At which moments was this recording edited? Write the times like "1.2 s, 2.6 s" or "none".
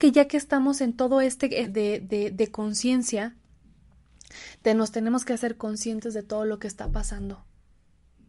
1.6 s